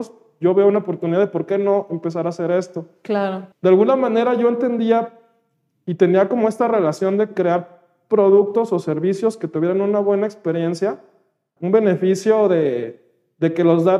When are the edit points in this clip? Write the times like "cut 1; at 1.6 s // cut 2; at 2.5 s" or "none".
cut 1; at 3.5 s // cut 2; at 11.6 s